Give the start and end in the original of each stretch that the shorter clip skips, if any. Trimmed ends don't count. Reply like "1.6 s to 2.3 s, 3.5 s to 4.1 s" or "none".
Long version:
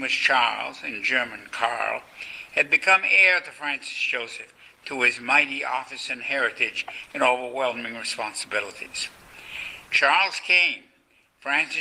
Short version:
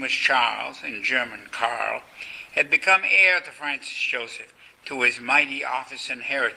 none